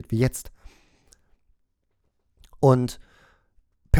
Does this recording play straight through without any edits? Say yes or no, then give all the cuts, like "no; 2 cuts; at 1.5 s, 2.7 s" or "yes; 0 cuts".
yes; 0 cuts